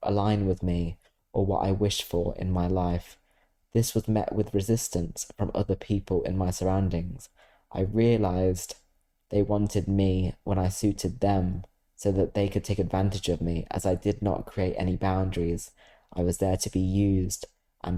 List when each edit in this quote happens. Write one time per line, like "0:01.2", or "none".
none